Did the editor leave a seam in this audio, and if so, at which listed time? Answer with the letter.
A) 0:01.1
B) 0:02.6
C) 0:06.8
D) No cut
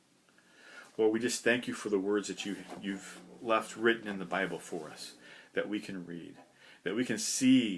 D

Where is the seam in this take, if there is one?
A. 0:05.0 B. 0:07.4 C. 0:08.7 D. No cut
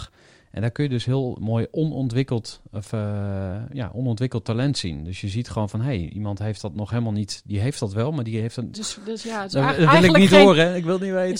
C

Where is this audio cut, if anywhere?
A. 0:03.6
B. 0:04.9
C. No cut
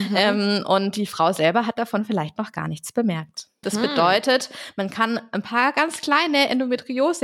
A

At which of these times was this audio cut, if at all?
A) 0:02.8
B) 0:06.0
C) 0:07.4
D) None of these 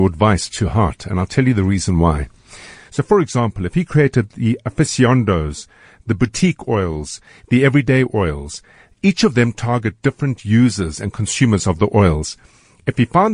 A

